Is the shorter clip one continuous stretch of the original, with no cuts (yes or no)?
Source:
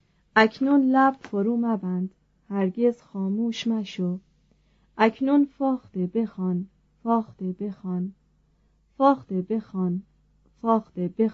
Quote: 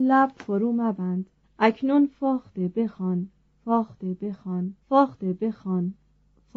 no